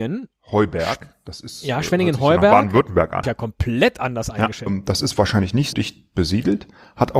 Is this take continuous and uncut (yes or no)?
no